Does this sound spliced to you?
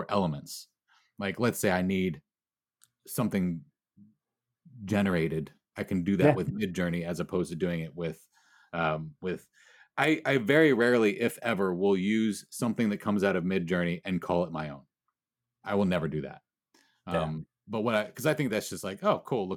no; 0 cuts

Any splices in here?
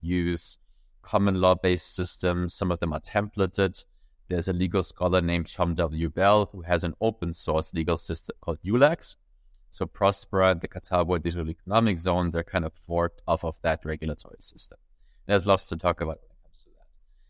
no; 0 cuts

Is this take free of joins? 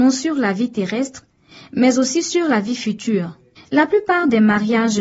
yes; 0 cuts

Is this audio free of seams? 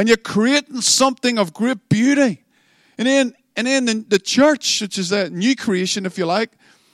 yes; 0 cuts

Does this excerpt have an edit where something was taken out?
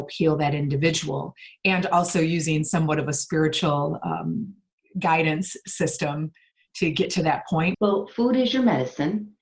yes; 1 cut; at 7.7 s

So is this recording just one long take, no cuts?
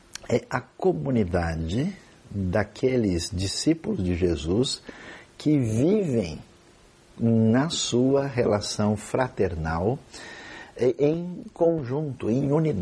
yes; 0 cuts

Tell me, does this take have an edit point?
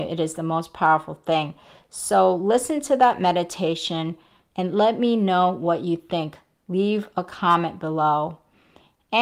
yes; 1 cut; at 4.5 s

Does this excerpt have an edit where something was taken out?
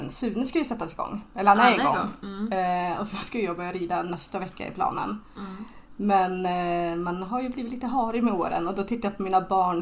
no; 0 cuts

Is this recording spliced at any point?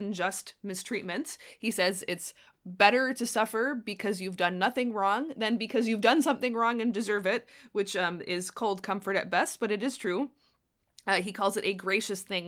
no; 0 cuts

